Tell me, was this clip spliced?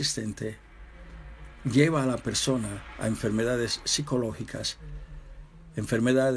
no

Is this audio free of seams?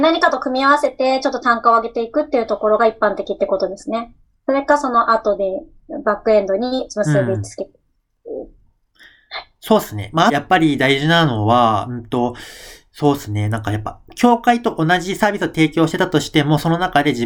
no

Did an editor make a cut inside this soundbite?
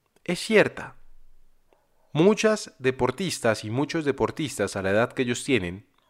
no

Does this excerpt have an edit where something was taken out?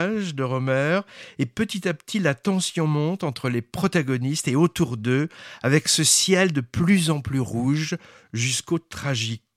no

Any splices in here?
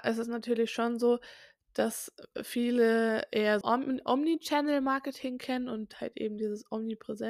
yes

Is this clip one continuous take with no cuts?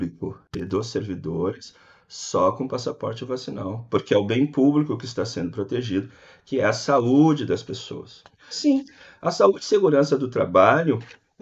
no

